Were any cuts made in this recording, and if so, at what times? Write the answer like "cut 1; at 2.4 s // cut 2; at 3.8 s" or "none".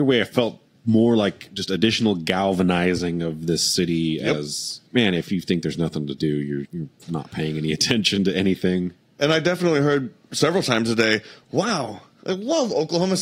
cut 1; at 4.9 s // cut 2; at 6.7 s